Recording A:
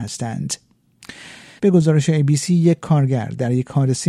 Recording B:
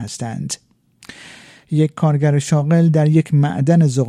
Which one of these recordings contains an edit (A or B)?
A